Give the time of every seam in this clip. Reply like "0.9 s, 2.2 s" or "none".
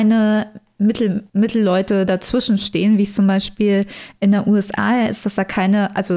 1.3 s